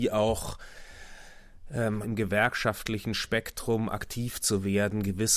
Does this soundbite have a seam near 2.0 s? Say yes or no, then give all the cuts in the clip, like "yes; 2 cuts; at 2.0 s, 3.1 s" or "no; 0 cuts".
yes; 1 cut; at 2.0 s